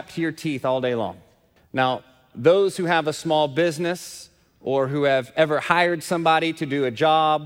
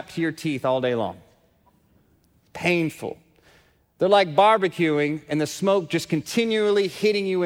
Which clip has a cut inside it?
first; 1 cut; at 1.6 s

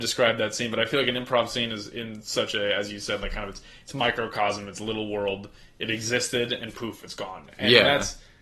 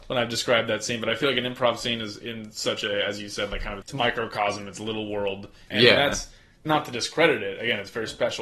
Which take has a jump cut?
second; 2 cuts; at 3.8 s, 5.7 s

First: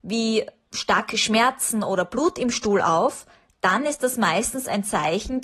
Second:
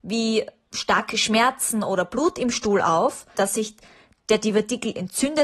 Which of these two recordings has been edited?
second; 1 cut; at 3.3 s

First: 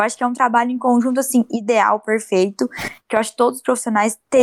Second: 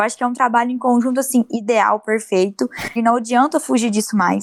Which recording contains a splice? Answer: second; 1 cut; at 3.0 s

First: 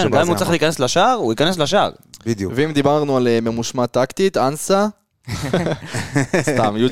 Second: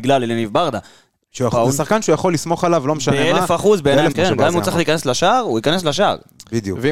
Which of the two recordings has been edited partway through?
second; 1 cut; at 4.1 s

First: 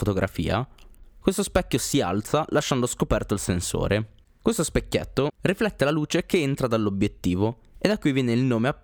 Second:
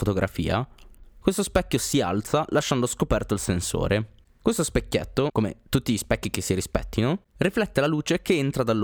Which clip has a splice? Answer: first; 1 cut; at 5.3 s

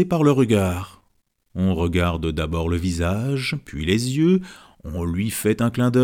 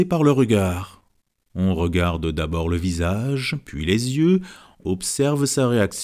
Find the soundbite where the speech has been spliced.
second; 1 cut; at 4.8 s

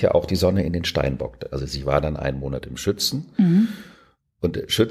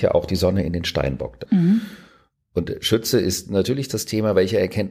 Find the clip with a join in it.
second; 1 cut; at 1.5 s

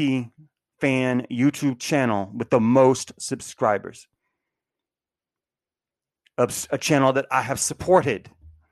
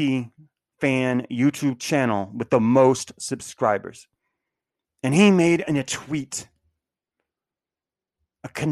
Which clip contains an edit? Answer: second; 1 cut; at 4.8 s

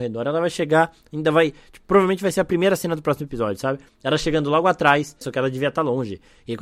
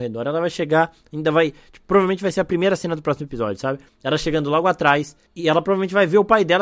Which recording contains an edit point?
first; 1 cut; at 5.2 s

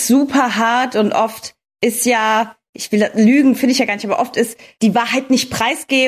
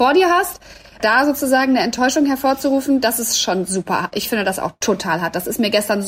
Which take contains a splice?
second; 1 cut; at 1.0 s

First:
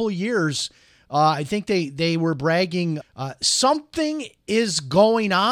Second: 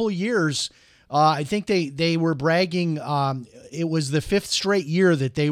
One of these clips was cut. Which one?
first; 1 cut; at 3.0 s

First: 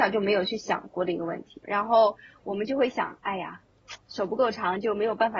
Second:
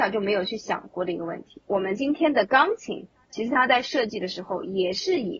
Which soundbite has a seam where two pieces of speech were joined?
first; 1 cut; at 1.6 s

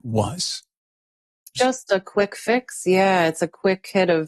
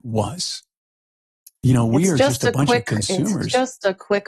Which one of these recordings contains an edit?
first; 1 cut; at 1.6 s

